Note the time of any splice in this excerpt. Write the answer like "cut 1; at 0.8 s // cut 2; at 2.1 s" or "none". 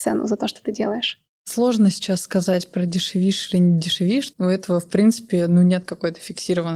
none